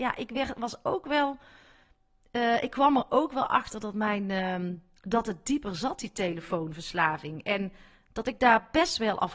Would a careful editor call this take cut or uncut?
uncut